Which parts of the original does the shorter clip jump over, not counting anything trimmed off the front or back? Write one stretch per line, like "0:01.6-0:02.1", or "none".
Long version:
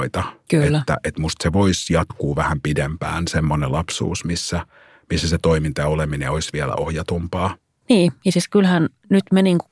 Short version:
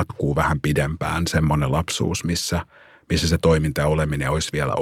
none